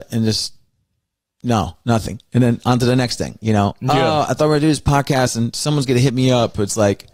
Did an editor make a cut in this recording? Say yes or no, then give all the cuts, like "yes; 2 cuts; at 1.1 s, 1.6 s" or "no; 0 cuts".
no; 0 cuts